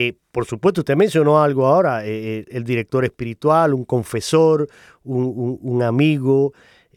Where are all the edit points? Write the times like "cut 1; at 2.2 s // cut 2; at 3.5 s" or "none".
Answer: none